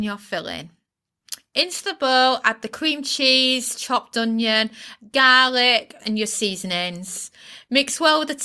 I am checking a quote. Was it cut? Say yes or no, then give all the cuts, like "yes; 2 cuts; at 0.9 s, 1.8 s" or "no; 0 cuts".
yes; 1 cut; at 6.0 s